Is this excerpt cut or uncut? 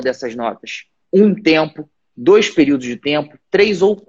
cut